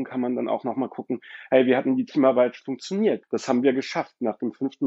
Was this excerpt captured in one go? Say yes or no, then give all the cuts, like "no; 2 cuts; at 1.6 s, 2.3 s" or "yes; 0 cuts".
no; 1 cut; at 3.2 s